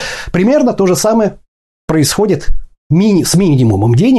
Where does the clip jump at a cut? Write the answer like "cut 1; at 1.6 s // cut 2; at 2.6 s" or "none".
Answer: none